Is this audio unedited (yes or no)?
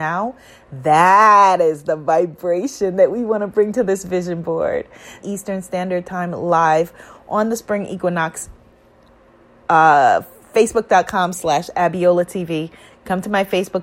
no